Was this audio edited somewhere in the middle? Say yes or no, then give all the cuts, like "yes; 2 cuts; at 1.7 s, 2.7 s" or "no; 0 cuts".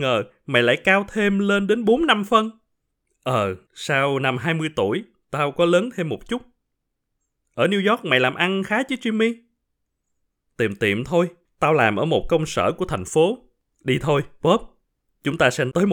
no; 0 cuts